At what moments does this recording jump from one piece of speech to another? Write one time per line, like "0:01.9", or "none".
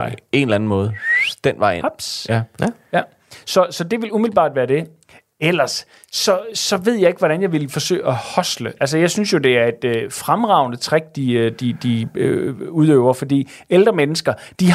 none